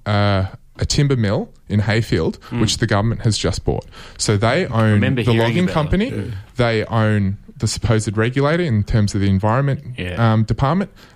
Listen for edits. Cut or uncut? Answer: uncut